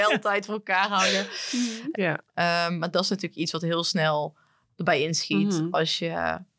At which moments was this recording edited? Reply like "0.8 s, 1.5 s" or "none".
1.9 s